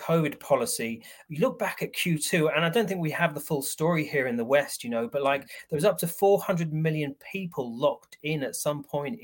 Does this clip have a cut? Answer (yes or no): yes